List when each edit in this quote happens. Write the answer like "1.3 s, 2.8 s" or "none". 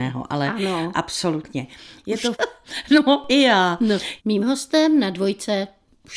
2.3 s, 4.2 s

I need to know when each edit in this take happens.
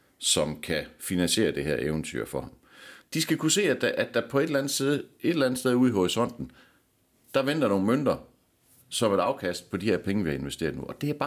3.0 s

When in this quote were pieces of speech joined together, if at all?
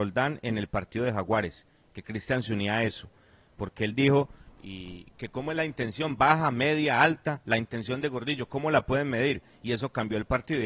none

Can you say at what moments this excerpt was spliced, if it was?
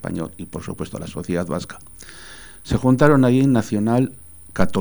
none

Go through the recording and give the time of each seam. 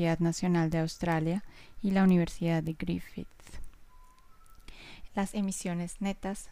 5.1 s

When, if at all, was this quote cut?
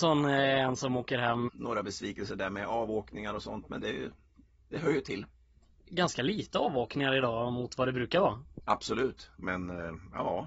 1.5 s, 9.3 s

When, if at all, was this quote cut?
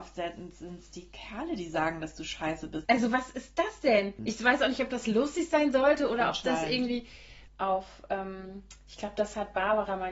2.9 s, 4.2 s, 7.5 s

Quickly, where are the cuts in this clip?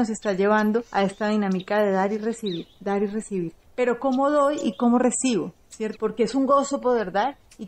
5.9 s

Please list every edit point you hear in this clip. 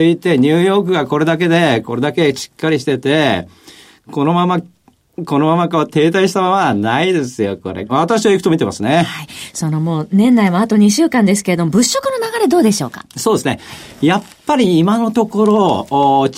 7.9 s

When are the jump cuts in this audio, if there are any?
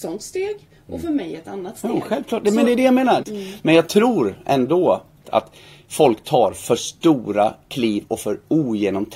3.2 s, 5.2 s

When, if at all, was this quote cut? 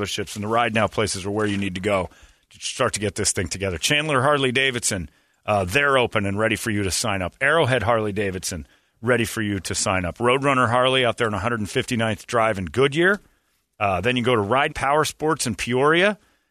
14.7 s

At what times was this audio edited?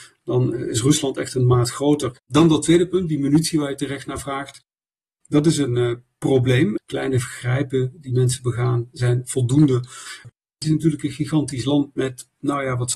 2.2 s, 6.8 s, 10.2 s

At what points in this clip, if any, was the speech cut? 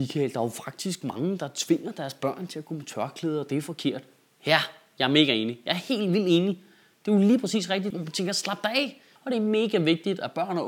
7.9 s, 9.2 s

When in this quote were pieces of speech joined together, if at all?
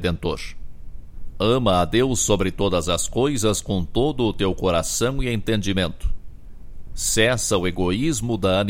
6.9 s

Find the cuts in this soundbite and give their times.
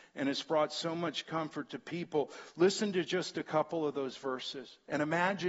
none

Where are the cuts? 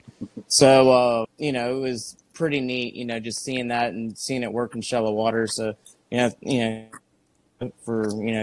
1.2 s

